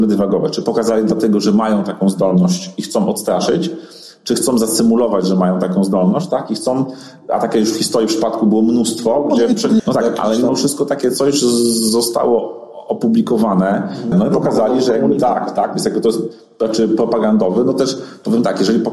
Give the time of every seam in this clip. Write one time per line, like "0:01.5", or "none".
0:09.8
0:14.1